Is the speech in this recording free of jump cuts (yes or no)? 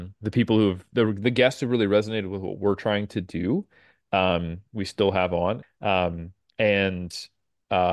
no